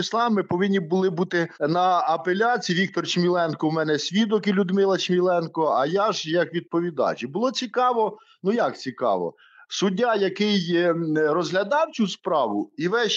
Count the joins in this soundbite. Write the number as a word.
one